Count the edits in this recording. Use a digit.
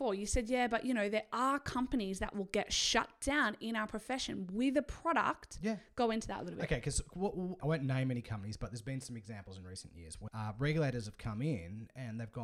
2